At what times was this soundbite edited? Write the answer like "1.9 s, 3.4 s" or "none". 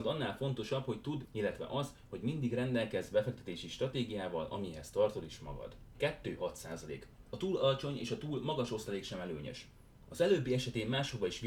1.2 s, 5.9 s